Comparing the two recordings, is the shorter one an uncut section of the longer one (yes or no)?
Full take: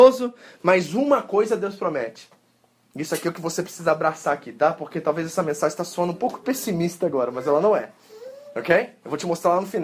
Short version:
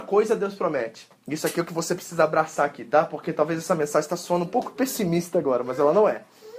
no